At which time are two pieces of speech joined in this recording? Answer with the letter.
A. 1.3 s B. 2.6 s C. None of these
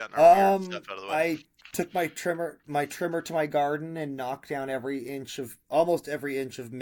B